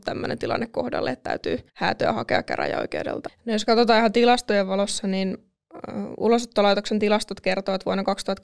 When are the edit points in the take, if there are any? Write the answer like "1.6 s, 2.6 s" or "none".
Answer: 1.7 s, 3.3 s